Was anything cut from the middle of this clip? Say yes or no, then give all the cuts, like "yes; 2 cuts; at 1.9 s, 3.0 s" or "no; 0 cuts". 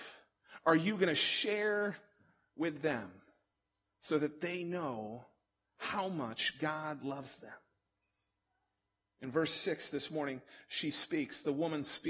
no; 0 cuts